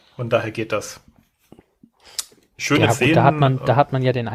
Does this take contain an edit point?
no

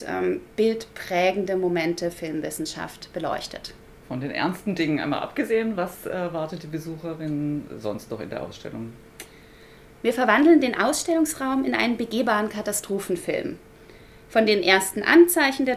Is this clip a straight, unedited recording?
yes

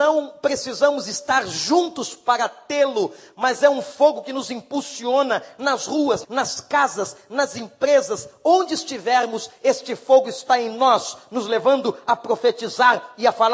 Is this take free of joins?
no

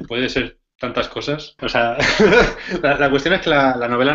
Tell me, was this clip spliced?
yes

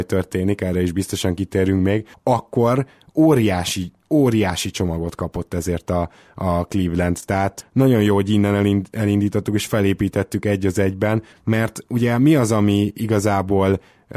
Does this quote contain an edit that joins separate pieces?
no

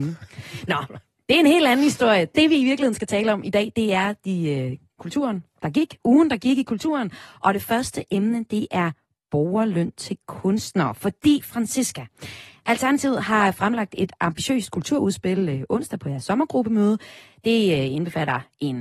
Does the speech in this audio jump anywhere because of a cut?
no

